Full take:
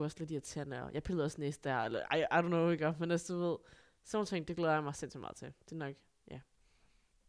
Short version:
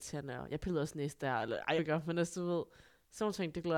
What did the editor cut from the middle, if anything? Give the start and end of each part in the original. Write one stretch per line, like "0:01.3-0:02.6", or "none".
0:02.2-0:02.7